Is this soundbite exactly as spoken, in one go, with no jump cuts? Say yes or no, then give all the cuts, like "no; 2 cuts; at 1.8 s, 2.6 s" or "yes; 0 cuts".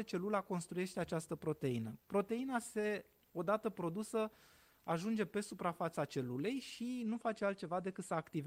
yes; 0 cuts